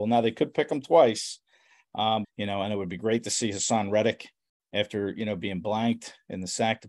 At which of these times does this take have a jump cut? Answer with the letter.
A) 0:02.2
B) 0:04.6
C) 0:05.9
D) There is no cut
A